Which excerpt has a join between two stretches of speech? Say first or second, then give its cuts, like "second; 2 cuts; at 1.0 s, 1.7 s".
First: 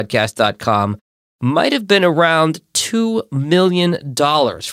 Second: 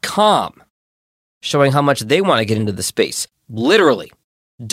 second; 1 cut; at 3.3 s